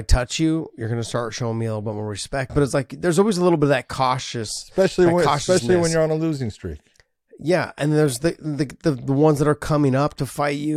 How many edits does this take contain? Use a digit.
1